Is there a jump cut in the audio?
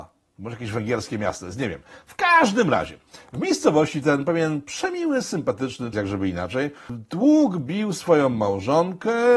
yes; 1 cut; at 5.9 s

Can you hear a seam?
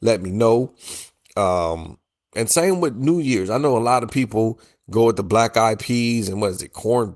no; 0 cuts

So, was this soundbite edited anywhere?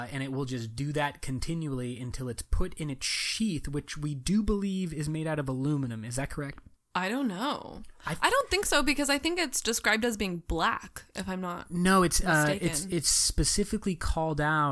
no; 0 cuts

